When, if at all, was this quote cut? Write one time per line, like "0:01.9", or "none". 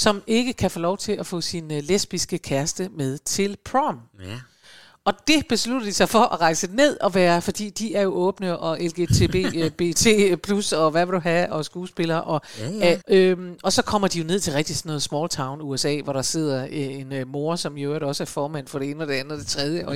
0:13.0